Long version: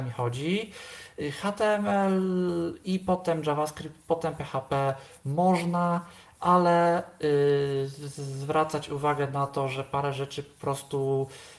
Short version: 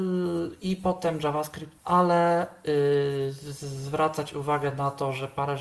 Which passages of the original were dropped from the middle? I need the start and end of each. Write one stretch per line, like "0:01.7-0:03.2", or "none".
0:04.0-0:06.3